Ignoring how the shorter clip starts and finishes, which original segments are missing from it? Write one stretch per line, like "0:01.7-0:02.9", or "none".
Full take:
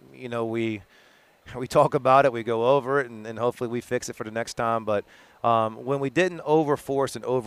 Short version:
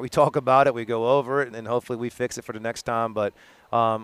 0:03.1-0:03.2